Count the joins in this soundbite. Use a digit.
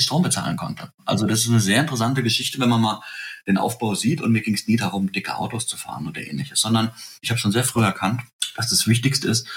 1